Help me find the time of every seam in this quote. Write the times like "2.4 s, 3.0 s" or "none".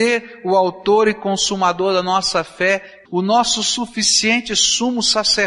3.1 s